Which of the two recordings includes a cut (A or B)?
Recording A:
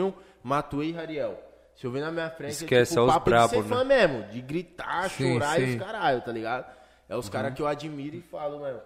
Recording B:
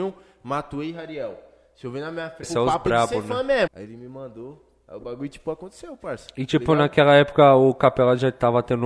B